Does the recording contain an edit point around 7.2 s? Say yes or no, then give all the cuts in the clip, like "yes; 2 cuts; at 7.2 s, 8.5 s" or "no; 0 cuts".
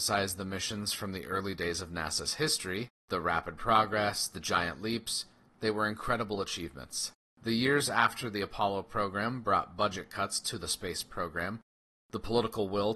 yes; 1 cut; at 7.2 s